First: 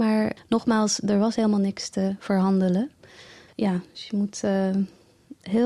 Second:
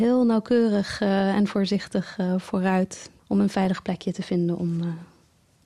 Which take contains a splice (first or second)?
first